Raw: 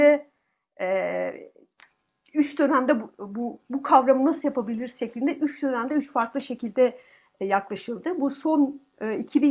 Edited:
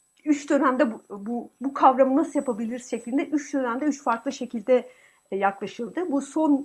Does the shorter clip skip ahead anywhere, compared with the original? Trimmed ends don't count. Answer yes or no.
no